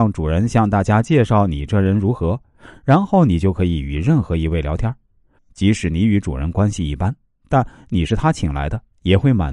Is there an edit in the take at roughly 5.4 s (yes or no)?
yes